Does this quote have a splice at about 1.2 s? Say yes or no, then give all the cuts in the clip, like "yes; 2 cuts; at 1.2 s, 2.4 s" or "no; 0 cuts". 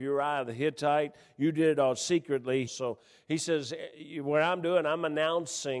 no; 1 cut; at 2.7 s